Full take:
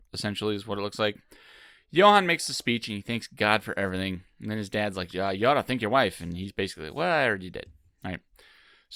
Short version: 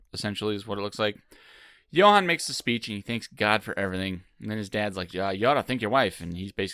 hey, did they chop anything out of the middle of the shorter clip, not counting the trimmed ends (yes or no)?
no